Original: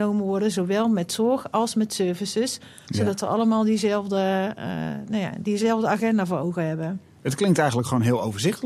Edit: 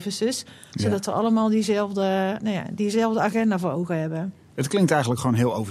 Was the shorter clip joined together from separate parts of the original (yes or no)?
yes